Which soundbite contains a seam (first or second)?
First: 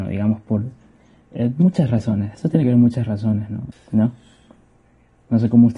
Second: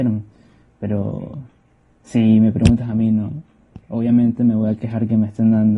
first